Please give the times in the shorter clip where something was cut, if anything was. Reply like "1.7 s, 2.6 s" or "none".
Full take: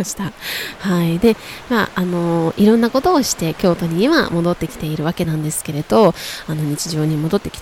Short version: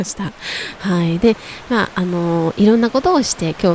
none